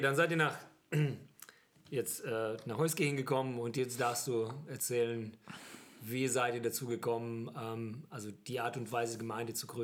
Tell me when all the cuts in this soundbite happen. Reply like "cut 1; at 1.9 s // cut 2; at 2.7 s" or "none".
none